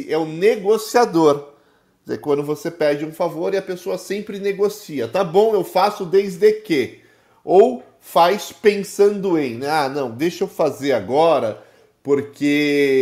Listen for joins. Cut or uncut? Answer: uncut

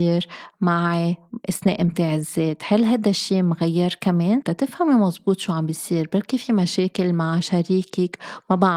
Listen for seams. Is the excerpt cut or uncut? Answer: cut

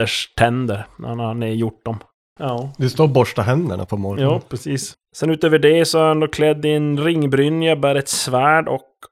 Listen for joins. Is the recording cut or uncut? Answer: cut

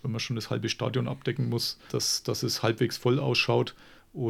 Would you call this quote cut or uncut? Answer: cut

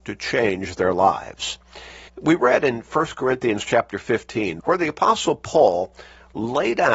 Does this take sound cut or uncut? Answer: cut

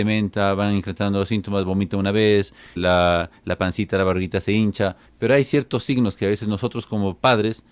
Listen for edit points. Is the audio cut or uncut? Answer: cut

